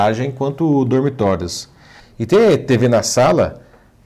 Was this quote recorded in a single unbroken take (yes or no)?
no